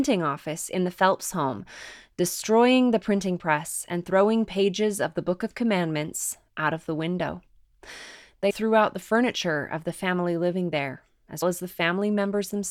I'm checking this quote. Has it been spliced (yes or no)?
yes